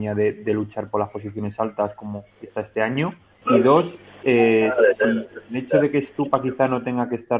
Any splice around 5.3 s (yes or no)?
no